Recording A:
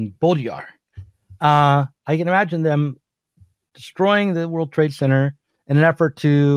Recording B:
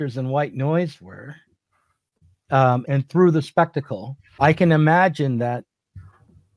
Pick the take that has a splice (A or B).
B